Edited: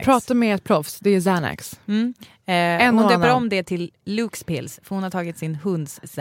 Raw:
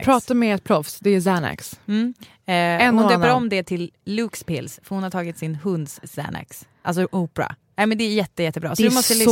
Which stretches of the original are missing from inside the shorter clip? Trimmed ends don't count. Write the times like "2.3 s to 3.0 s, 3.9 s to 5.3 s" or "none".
none